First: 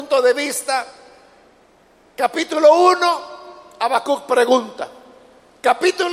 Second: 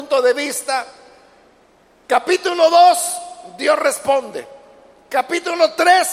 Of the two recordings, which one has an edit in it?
second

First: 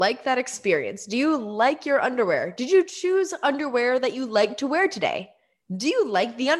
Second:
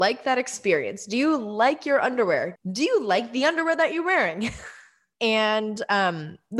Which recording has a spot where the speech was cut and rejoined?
second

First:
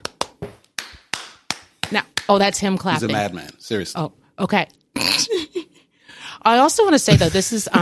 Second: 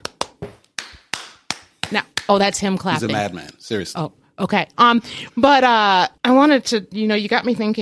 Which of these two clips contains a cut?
second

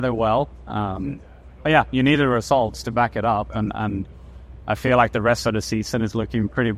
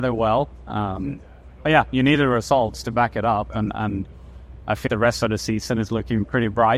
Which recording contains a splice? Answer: second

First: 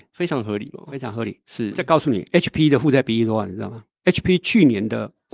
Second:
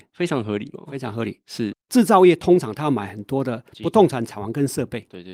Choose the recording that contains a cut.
second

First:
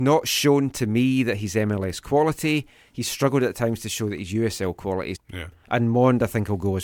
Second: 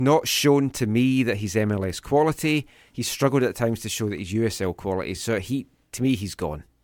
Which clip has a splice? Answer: first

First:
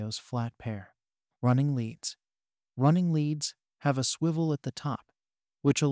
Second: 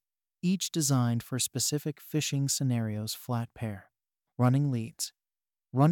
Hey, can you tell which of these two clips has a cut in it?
first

